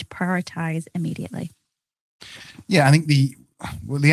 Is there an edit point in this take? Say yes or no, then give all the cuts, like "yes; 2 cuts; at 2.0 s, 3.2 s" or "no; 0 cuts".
no; 0 cuts